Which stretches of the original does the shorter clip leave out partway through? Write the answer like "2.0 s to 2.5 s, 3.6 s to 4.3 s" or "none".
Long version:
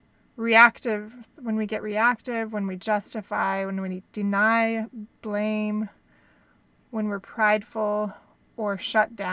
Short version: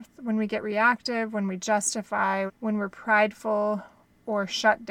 3.7 s to 6.8 s

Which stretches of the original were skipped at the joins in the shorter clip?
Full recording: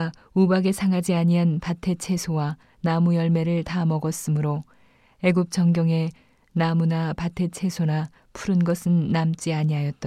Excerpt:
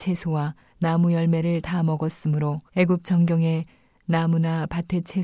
4.7 s to 5.1 s

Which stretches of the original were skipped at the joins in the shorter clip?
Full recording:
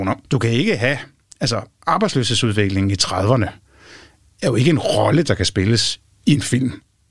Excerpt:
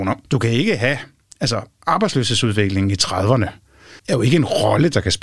4.0 s to 4.3 s

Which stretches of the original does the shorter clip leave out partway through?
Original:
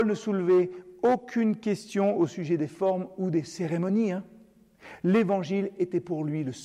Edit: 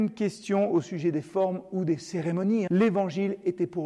4.1 s to 5.0 s

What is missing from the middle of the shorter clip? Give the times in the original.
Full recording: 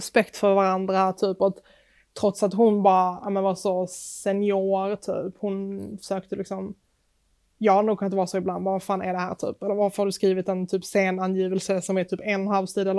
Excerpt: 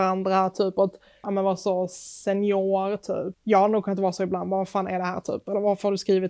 1.9 s to 3.2 s, 5.3 s to 7.5 s

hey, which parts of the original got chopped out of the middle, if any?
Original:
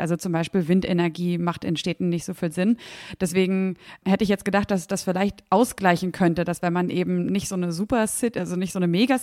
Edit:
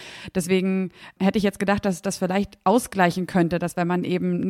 none

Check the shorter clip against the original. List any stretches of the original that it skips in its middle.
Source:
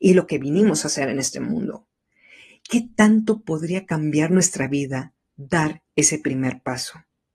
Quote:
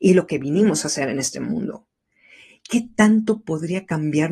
none

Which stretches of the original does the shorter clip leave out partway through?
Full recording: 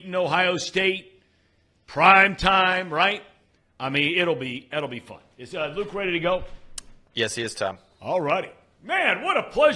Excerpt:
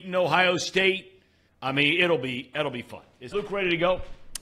1.5 s to 3.7 s, 5.5 s to 5.7 s

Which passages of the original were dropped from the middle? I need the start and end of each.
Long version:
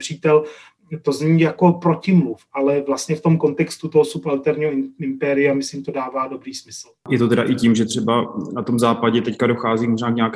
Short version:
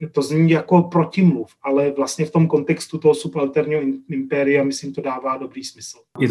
none

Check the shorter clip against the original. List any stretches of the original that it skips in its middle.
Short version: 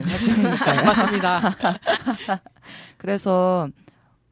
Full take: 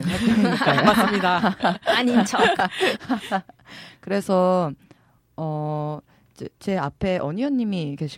1.9 s to 3.0 s

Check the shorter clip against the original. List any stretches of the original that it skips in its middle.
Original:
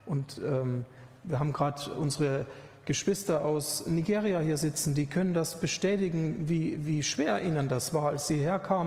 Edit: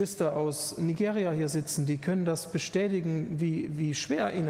none

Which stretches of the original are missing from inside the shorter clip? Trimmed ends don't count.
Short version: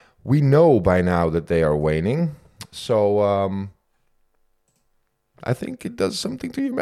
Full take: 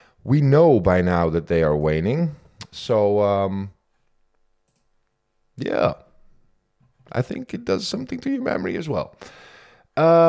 5.3 s to 7.0 s

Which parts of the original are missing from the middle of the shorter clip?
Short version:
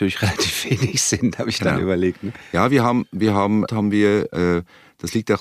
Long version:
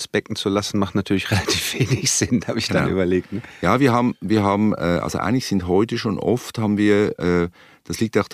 4.8 s to 6.5 s

